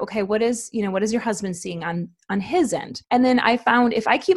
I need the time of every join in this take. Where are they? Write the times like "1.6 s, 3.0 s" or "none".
3.0 s